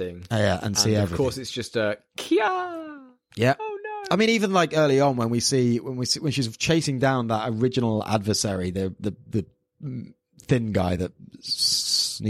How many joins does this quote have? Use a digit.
0